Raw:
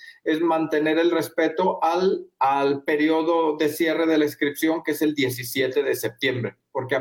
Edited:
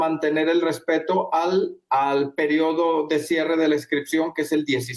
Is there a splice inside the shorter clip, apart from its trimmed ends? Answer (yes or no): no